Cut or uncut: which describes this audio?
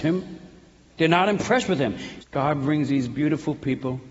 cut